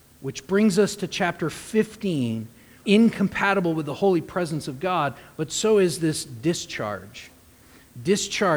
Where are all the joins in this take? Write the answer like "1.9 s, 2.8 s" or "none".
2.8 s